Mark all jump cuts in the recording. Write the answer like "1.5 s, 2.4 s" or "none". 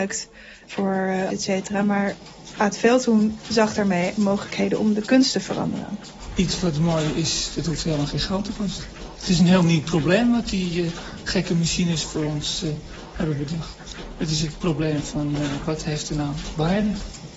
1.3 s